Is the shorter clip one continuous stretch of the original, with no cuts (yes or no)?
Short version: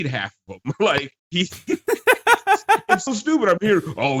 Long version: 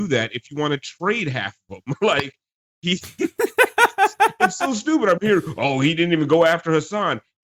no